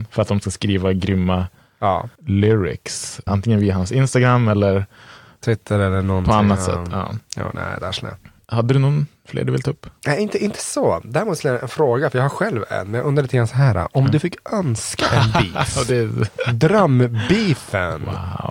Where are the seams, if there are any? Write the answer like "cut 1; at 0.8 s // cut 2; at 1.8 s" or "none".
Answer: cut 1; at 2.2 s // cut 2; at 3.3 s